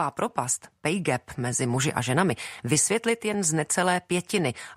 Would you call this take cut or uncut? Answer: uncut